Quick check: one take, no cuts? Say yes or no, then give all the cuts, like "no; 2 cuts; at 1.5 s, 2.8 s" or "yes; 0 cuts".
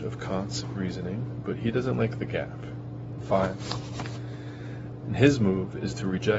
no; 2 cuts; at 3.2 s, 5.0 s